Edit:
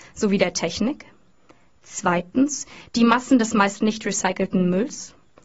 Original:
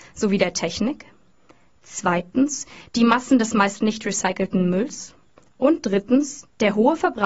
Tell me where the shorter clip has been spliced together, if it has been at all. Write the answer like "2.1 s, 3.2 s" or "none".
none